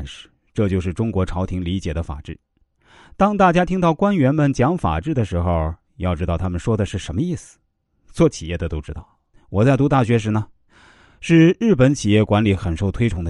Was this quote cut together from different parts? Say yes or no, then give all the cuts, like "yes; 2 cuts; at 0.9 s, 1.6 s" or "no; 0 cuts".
yes; 1 cut; at 9.3 s